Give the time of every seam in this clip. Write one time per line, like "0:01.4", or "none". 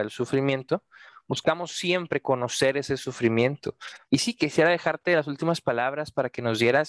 0:04.0